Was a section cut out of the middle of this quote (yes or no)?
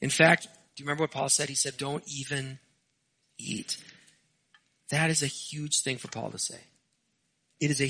yes